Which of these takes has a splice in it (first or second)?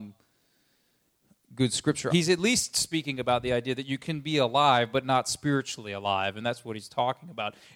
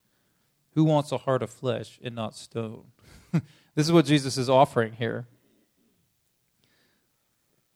first